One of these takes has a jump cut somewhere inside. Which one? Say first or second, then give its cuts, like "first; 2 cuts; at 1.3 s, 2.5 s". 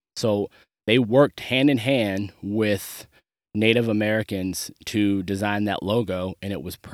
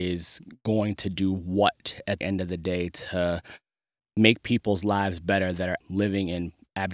second; 2 cuts; at 2.2 s, 5.8 s